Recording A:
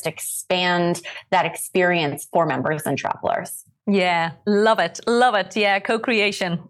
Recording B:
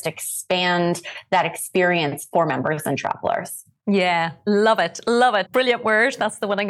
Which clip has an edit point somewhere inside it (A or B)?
B